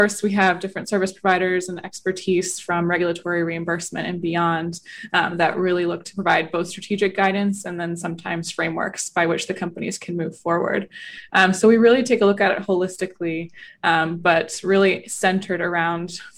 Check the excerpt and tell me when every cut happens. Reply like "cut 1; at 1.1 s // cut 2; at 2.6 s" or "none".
none